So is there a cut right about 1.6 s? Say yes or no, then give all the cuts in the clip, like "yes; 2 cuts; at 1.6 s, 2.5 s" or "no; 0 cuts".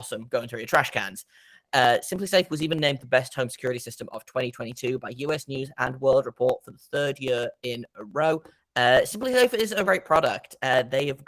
no; 2 cuts; at 8.6 s, 9.8 s